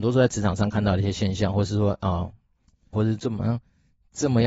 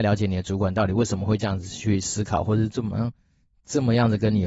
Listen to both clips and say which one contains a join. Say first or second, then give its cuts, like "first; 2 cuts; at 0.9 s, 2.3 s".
first; 1 cut; at 2.9 s